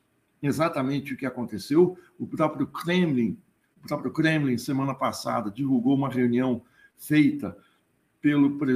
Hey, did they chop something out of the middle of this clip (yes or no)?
no